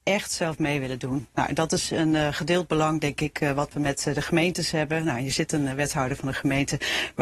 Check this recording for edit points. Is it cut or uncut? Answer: uncut